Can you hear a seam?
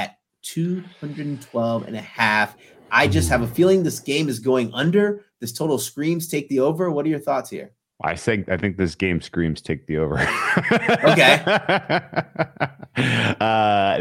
no; 0 cuts

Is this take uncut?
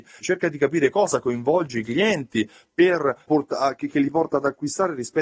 no; 1 cut; at 3.3 s

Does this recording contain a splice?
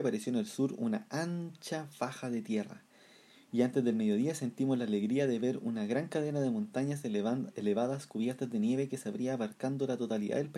no; 0 cuts

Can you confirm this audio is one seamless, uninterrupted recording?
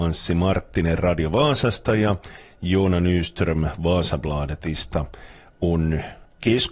yes; 0 cuts

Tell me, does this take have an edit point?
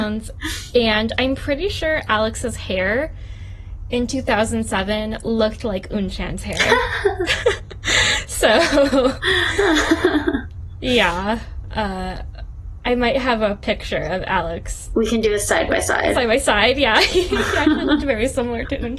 no; 0 cuts

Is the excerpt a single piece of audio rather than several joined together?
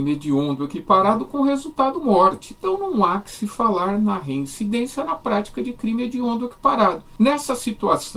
no; 1 cut; at 2.6 s

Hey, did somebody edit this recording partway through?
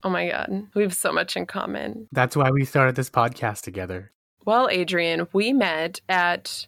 yes; 1 cut; at 4.4 s

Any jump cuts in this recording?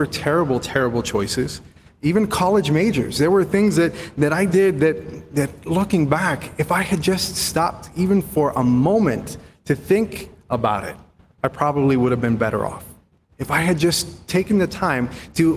no; 0 cuts

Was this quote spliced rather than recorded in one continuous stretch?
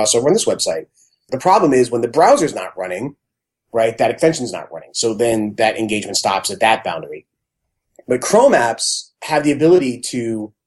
yes; 1 cut; at 1.3 s

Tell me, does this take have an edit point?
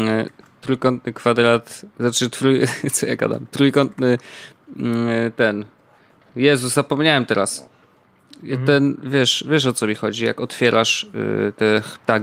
no; 0 cuts

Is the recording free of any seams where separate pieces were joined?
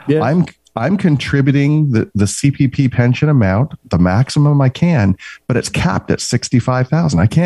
yes; 0 cuts

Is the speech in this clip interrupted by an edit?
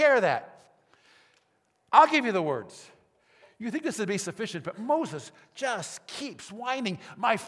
no; 0 cuts

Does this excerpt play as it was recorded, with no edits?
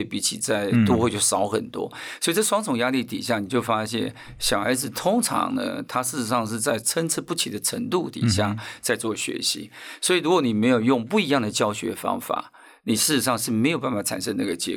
yes; 0 cuts

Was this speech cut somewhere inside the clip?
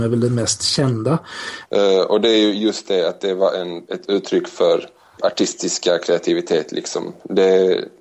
yes; 3 cuts; at 1.6 s, 3.9 s, 5.2 s

